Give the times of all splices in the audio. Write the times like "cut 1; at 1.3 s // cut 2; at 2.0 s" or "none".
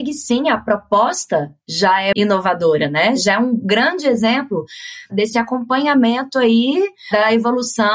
cut 1; at 2.1 s